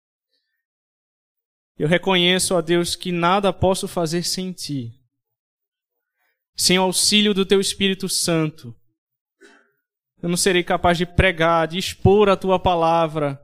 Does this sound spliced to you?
no; 0 cuts

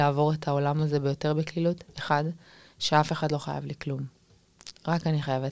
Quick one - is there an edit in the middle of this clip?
no; 0 cuts

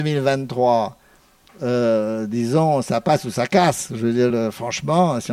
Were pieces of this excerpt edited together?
yes; 1 cut; at 4.3 s

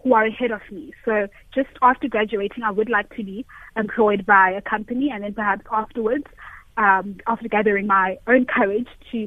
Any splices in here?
no; 0 cuts

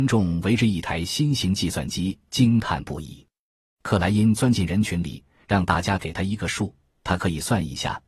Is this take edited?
no; 0 cuts

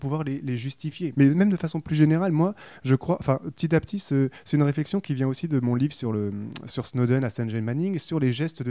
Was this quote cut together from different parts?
yes; 1 cut; at 1.1 s

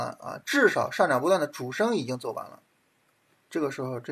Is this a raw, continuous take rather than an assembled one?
yes; 0 cuts

